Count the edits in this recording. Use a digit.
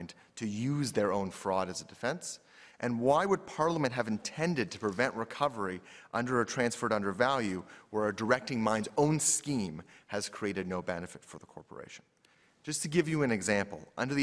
0